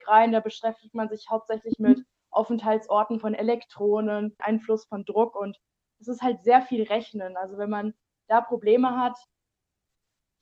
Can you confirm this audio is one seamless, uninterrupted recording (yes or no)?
no